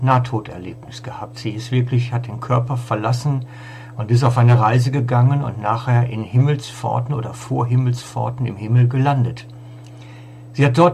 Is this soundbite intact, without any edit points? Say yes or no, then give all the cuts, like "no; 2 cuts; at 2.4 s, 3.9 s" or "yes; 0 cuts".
yes; 0 cuts